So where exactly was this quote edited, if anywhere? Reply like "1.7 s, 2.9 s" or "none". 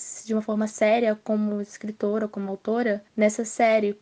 3.1 s